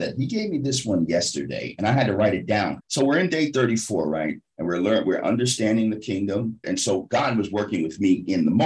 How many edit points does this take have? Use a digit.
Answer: 2